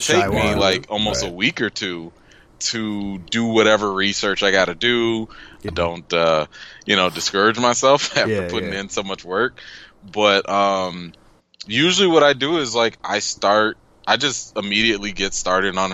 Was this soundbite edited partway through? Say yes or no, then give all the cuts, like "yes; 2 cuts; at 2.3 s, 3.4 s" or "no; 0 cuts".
yes; 1 cut; at 5.7 s